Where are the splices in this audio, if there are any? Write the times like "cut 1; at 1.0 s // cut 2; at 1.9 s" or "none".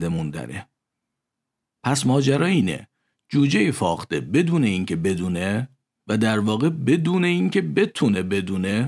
cut 1; at 1.7 s

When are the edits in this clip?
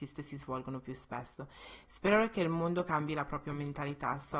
none

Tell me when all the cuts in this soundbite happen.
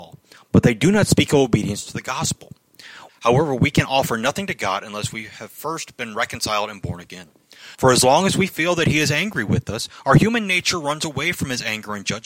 cut 1; at 3.1 s // cut 2; at 7.7 s

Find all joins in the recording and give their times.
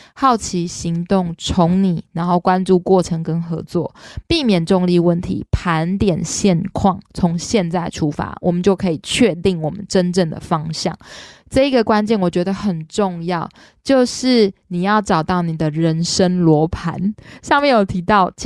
none

